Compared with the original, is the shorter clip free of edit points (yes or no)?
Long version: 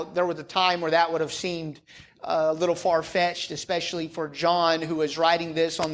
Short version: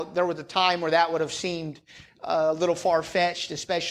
yes